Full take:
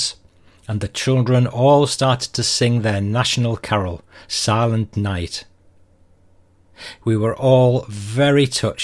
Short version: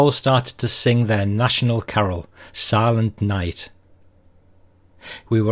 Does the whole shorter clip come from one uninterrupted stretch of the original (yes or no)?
yes